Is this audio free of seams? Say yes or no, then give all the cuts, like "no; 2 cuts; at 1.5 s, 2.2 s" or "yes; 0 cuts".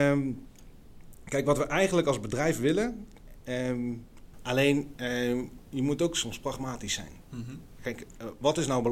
no; 1 cut; at 4.3 s